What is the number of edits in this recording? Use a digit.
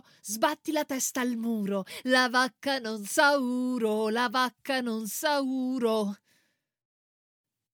0